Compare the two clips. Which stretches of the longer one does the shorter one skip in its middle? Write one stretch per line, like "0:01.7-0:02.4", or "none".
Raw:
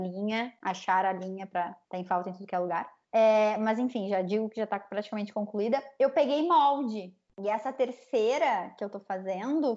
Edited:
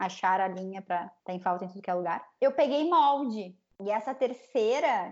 0:03.0-0:06.0